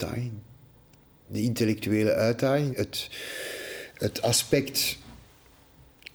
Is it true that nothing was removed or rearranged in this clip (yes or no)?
no